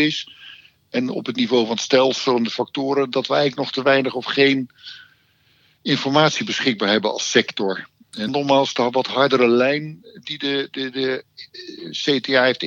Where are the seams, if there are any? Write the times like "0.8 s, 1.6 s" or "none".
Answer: 8.3 s